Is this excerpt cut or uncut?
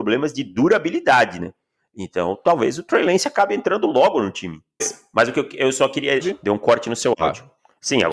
cut